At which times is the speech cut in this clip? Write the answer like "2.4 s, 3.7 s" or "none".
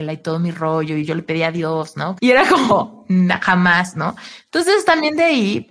2.2 s